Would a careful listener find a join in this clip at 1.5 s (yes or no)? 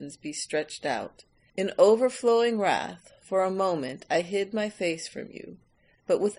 yes